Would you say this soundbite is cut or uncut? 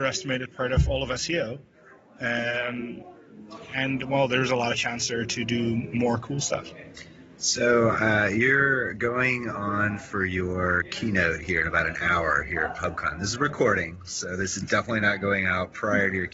uncut